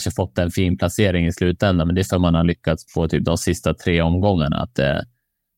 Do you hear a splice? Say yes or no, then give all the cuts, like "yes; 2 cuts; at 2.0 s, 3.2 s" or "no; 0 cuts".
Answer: no; 0 cuts